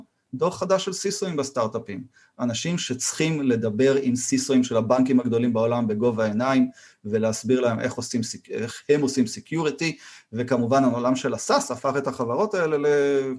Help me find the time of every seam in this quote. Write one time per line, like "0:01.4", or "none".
none

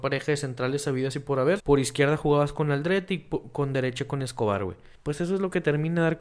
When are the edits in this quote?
0:01.6
0:04.9

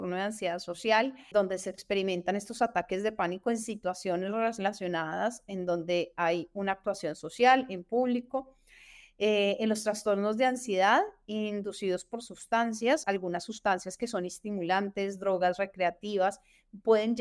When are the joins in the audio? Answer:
0:01.3
0:13.0

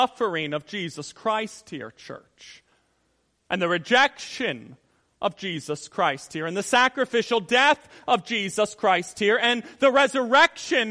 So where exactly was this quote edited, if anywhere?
none

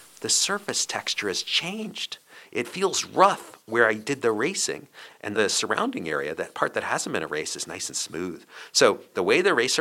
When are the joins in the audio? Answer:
0:05.1

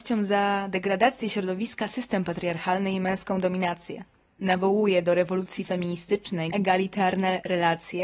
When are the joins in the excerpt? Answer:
0:06.5

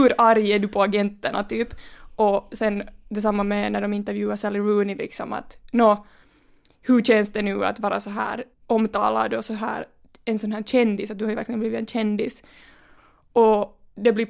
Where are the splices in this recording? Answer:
0:08.5

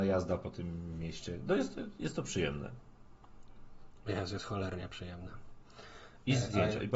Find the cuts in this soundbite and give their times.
none

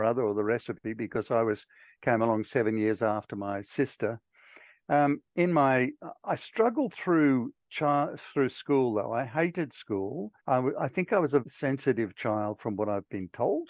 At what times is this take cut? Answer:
0:10.4
0:11.4

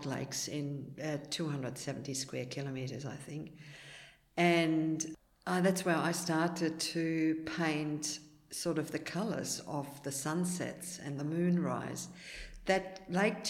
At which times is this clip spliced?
0:01.0

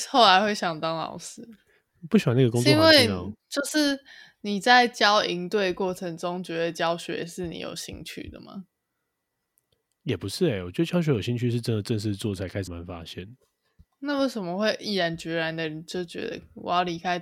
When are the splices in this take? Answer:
0:12.7

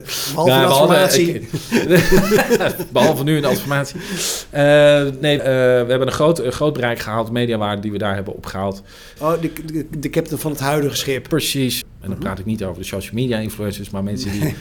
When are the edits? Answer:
0:05.4
0:09.2
0:11.8

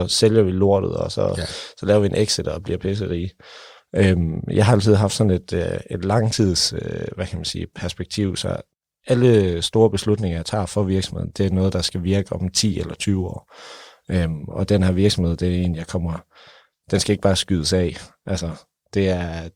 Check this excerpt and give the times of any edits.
none

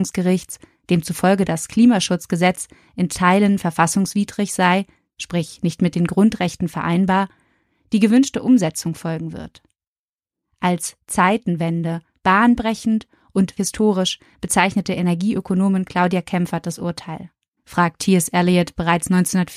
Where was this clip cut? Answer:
0:13.6
0:17.6

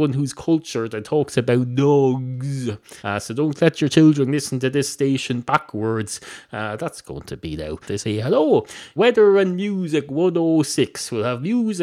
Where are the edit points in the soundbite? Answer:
0:03.0
0:07.8
0:09.0

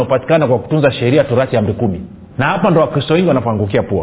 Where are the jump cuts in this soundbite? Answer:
0:02.3

